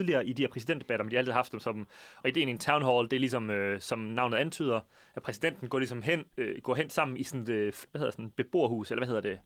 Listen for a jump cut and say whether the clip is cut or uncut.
cut